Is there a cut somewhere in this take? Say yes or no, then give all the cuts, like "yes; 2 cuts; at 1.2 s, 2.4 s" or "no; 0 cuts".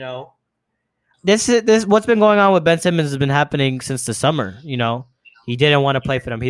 yes; 1 cut; at 1.1 s